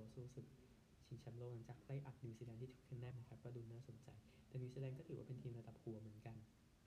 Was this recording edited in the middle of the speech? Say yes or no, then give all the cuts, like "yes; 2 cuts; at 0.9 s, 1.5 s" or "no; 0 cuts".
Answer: yes; 1 cut; at 3.1 s